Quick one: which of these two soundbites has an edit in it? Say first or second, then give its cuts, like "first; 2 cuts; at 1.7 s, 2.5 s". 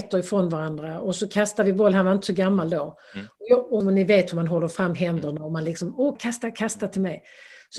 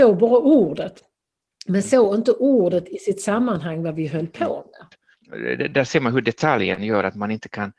first; 2 cuts; at 3.8 s, 6.2 s